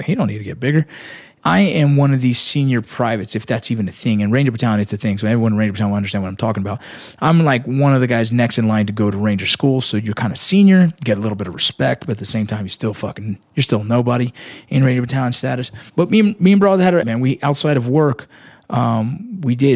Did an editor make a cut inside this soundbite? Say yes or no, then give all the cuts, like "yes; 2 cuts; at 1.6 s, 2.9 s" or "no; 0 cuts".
yes; 3 cuts; at 1.4 s, 15.9 s, 17.0 s